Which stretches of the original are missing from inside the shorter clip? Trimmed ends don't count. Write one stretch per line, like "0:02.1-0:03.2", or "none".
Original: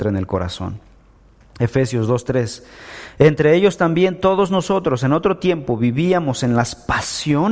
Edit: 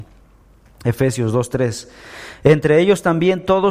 none